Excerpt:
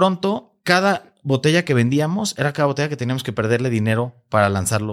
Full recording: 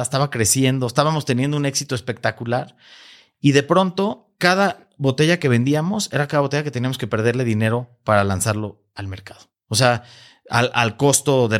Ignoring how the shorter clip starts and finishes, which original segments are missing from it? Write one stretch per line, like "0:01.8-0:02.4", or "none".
none